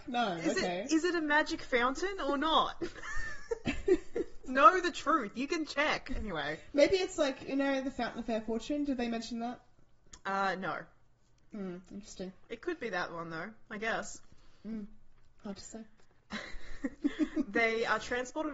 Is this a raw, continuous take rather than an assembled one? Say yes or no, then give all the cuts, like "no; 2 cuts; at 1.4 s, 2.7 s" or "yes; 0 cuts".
no; 1 cut; at 5.7 s